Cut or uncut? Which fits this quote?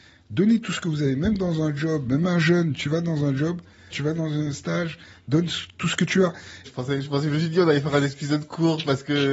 cut